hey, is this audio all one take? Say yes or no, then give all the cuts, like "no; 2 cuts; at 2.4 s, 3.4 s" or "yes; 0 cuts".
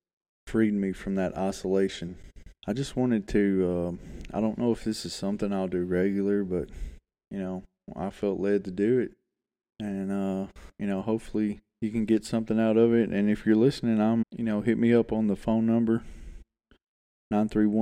no; 1 cut; at 14.2 s